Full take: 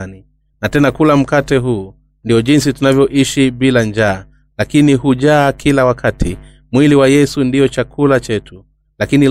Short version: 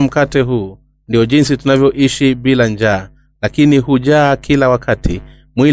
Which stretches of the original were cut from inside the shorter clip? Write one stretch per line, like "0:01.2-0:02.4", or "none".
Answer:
none